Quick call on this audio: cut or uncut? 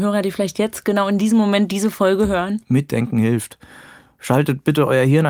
uncut